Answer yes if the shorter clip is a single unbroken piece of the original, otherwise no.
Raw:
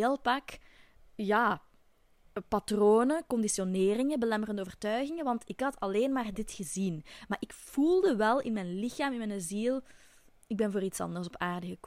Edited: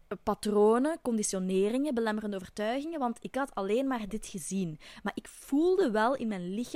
yes